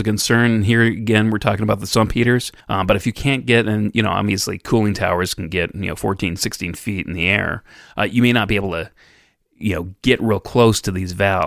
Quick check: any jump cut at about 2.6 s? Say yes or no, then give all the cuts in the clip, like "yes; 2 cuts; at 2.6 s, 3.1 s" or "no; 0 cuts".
yes; 1 cut; at 2.6 s